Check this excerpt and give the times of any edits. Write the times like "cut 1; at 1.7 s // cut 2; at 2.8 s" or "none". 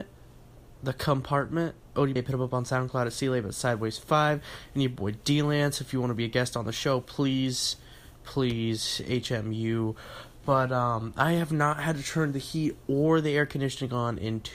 cut 1; at 2.2 s